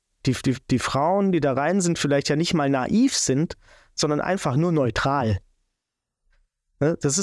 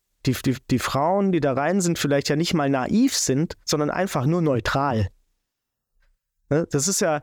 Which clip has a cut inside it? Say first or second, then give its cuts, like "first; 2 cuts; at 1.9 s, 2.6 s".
second; 1 cut; at 3.6 s